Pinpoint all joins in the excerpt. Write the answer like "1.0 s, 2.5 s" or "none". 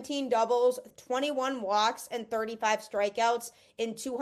0.9 s